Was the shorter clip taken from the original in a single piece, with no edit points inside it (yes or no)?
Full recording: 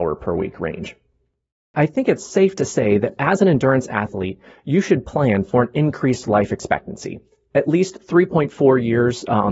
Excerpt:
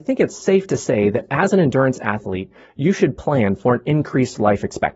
yes